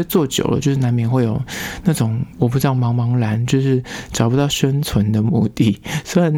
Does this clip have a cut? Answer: no; 0 cuts

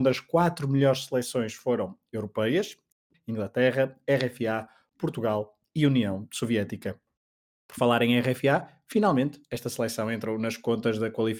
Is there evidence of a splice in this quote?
yes; 1 cut; at 3.1 s

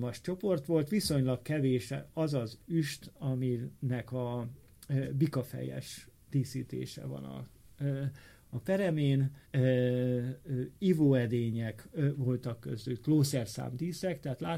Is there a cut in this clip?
yes; 1 cut; at 9.4 s

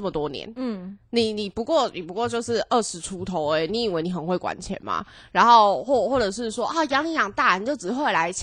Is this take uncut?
yes; 0 cuts

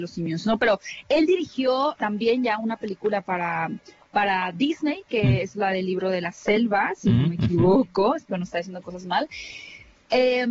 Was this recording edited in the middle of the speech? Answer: yes; 1 cut; at 2.0 s

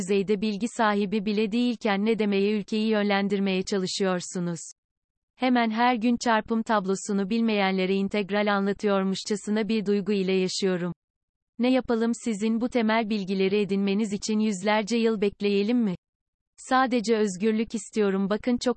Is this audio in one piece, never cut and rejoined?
yes; 0 cuts

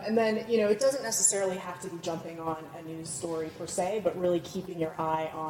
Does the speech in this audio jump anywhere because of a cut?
no; 0 cuts

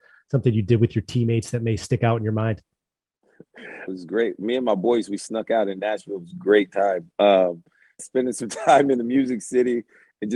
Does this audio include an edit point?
yes; 2 cuts; at 3.9 s, 8.0 s

